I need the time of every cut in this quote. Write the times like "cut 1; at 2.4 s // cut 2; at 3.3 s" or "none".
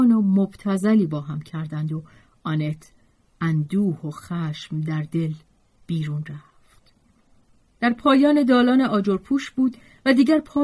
none